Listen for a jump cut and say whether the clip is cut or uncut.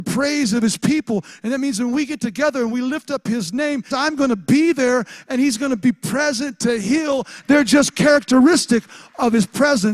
cut